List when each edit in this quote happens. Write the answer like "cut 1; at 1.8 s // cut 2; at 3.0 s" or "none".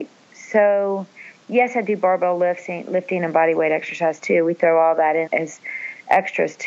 cut 1; at 5.3 s